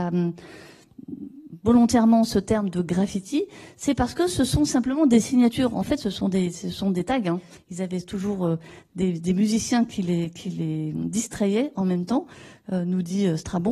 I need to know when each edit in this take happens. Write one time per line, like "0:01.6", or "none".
0:07.6